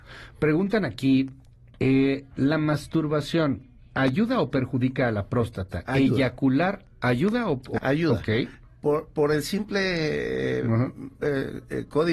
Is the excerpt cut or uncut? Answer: cut